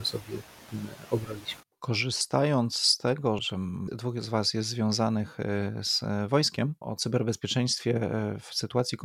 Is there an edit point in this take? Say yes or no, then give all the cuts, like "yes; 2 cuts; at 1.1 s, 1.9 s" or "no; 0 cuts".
yes; 2 cuts; at 3.4 s, 6.8 s